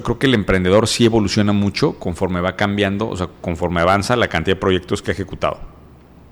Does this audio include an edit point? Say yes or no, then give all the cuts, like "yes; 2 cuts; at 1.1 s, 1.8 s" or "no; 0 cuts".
no; 0 cuts